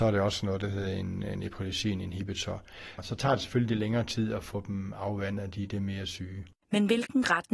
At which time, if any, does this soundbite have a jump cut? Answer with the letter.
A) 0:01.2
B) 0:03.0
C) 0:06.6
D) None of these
B